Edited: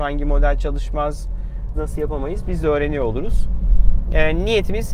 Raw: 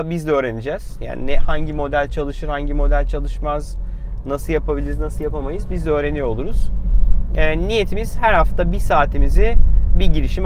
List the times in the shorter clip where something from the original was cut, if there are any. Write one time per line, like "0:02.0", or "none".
0:01.7